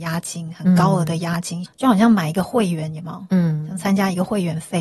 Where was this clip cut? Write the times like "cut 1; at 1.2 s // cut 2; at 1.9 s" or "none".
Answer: cut 1; at 1.7 s